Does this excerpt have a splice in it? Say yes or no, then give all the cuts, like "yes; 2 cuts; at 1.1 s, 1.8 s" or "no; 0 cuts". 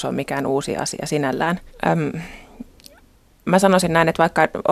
yes; 1 cut; at 1.7 s